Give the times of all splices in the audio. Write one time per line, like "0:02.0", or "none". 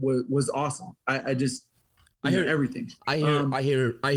none